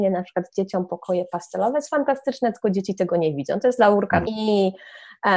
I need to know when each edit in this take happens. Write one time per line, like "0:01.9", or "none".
0:04.2